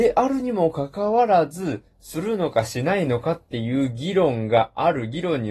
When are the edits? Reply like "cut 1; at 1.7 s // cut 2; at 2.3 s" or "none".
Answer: none